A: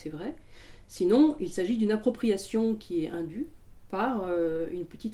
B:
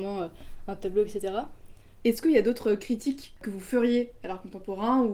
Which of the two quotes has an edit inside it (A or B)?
B